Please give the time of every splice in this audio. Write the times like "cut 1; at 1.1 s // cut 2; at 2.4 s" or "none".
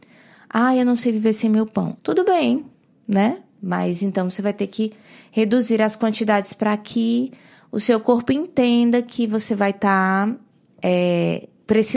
cut 1; at 2.0 s

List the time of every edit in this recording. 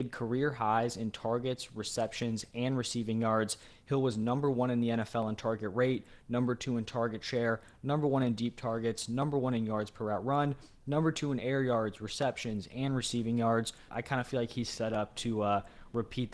cut 1; at 13.9 s

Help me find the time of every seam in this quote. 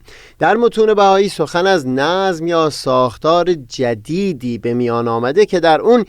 none

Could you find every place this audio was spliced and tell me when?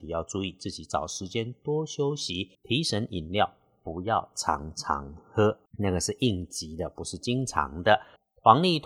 cut 1; at 2.5 s

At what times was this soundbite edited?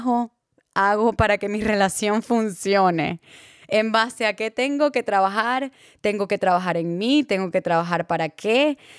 none

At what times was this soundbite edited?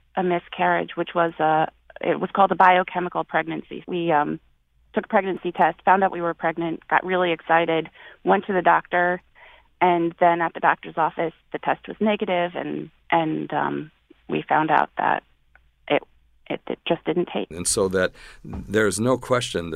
cut 1; at 3.8 s // cut 2; at 17.5 s

